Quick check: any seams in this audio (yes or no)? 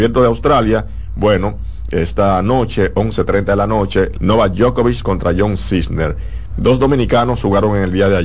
yes